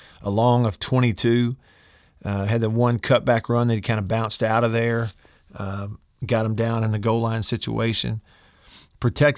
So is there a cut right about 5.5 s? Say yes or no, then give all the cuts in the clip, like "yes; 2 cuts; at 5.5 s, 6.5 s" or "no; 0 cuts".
no; 0 cuts